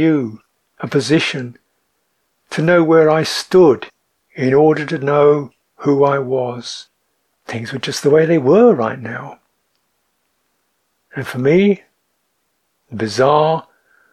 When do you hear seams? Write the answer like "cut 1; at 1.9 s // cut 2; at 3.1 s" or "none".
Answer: cut 1; at 7.3 s